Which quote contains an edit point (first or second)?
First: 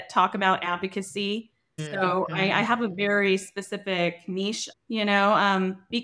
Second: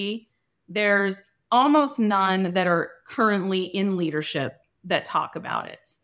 first